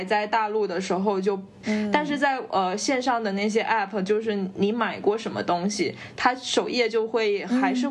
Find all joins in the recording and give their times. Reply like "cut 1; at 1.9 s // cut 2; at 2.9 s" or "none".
cut 1; at 1.6 s